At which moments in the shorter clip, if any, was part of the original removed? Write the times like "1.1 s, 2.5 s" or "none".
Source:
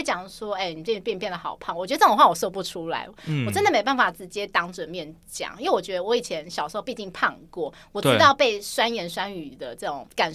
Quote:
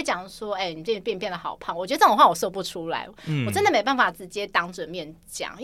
none